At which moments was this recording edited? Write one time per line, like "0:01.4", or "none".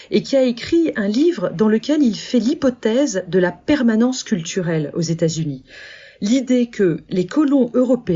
none